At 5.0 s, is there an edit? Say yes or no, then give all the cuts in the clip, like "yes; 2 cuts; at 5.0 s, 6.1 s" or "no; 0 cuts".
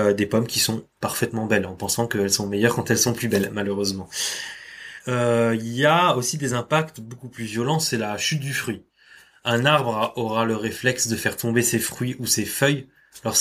yes; 1 cut; at 5.0 s